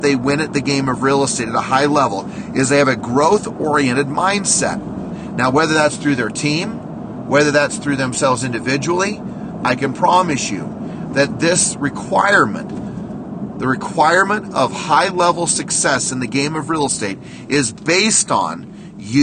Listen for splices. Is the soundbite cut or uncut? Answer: cut